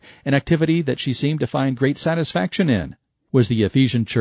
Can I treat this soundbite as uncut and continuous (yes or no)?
no